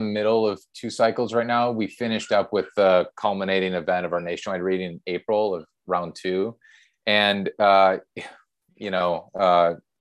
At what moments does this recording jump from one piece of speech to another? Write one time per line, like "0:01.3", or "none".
none